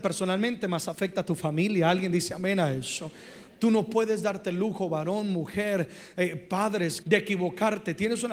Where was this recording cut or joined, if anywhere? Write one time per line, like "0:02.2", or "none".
0:07.0

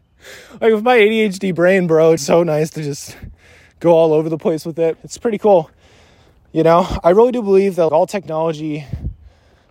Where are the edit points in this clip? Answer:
0:02.2
0:05.0
0:07.9

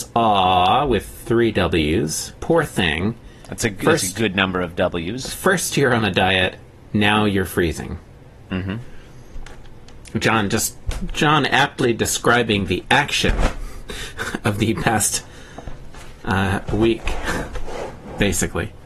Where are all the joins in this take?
0:02.4

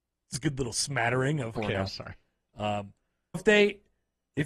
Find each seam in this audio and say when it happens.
0:01.5
0:03.3

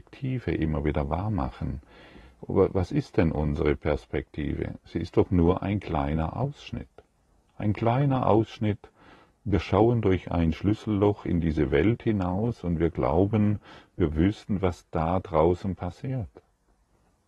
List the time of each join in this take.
none

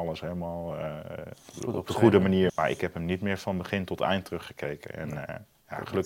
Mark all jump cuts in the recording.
0:02.5

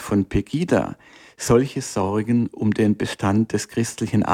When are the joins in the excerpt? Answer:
none

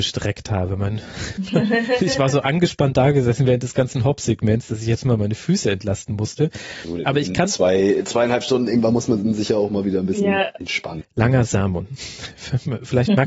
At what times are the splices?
0:11.0

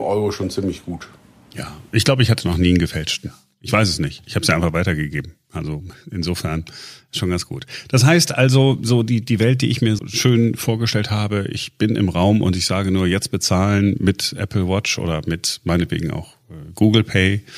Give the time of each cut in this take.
0:10.0

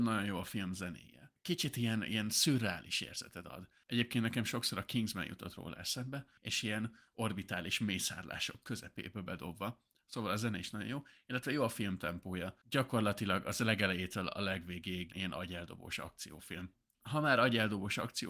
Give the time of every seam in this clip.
0:06.4
0:15.1

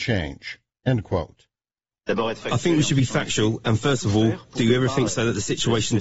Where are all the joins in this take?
0:01.9

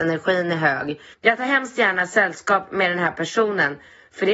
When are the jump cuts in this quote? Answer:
0:01.1

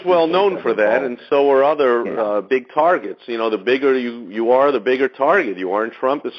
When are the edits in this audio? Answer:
none

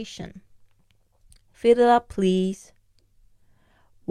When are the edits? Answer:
none

